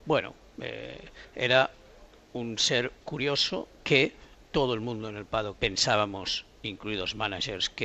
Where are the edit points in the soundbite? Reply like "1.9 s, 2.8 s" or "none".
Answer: 4.5 s, 5.6 s